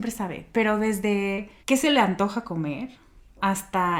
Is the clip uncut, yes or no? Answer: no